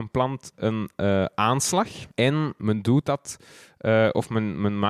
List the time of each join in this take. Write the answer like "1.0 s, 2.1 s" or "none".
2.1 s